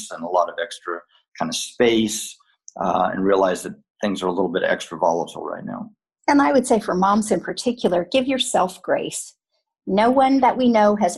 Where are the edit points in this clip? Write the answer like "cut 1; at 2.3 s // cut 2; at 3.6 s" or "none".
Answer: none